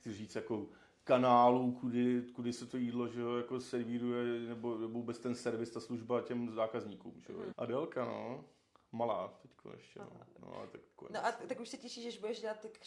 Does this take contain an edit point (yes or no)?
yes